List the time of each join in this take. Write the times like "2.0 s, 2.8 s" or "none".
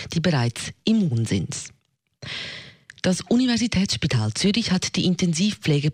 none